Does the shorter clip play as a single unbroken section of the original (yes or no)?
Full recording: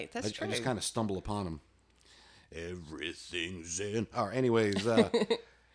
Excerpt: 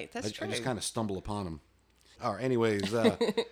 no